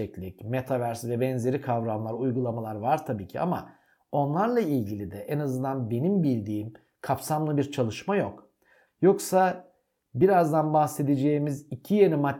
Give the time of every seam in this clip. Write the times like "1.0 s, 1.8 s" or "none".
8.9 s